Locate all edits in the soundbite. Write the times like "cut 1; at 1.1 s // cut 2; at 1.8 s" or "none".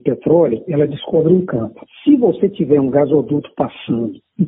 cut 1; at 1.9 s